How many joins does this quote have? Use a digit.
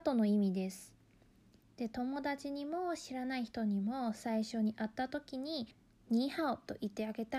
2